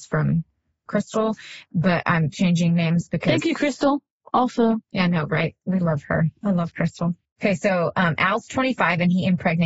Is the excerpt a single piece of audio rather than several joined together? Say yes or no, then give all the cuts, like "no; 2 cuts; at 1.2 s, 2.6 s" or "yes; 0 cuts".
yes; 0 cuts